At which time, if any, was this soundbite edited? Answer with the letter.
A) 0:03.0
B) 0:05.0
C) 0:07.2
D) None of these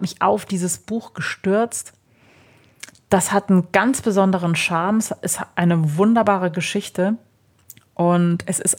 D